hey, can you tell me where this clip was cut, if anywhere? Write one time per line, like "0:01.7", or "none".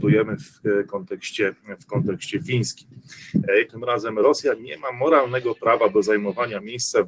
0:03.7